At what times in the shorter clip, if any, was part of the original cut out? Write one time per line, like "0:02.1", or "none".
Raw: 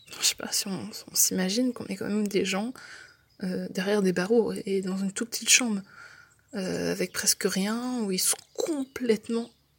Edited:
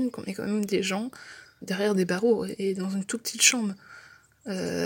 0:01.6